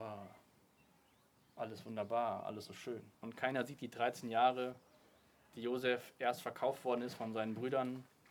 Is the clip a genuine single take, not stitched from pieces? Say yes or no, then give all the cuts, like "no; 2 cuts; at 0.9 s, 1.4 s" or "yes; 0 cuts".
no; 1 cut; at 3.1 s